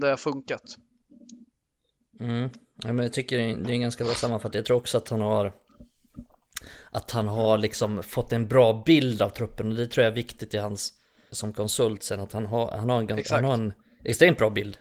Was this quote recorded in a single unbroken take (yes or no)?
no